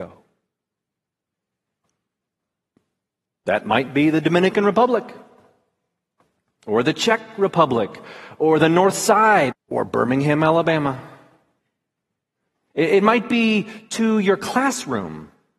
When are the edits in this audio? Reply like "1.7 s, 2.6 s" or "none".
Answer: 9.5 s